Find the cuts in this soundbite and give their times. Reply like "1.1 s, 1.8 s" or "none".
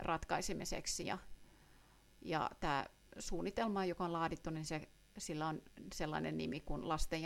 1.0 s